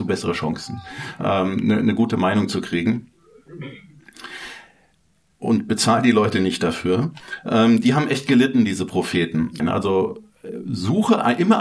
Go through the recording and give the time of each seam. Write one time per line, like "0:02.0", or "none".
0:09.6